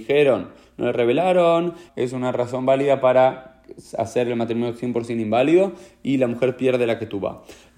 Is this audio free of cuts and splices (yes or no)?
no